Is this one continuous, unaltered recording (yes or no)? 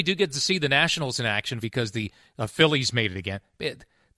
no